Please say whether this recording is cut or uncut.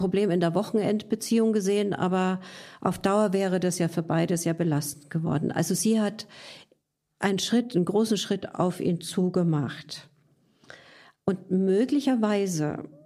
uncut